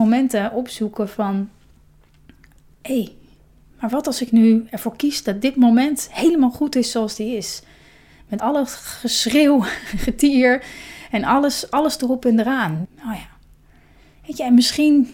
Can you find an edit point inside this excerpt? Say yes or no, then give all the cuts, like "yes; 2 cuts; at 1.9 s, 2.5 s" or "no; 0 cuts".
yes; 2 cuts; at 8.4 s, 12.8 s